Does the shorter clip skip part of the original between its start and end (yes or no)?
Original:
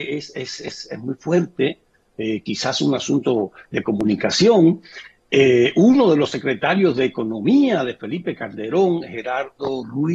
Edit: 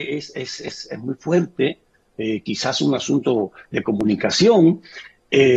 no